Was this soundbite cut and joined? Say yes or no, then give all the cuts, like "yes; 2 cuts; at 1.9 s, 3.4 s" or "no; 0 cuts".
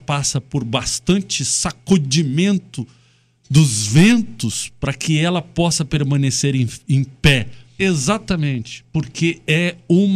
yes; 1 cut; at 7.8 s